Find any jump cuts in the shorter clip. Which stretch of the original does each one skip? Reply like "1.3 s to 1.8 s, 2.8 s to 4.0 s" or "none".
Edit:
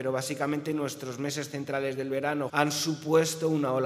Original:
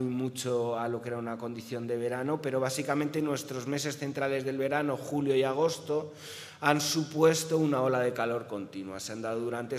5.0 s to 6.6 s